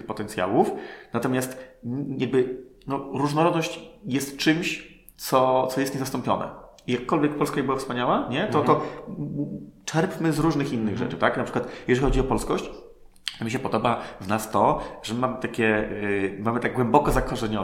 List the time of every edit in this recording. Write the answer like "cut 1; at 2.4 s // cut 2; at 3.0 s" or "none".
cut 1; at 5.1 s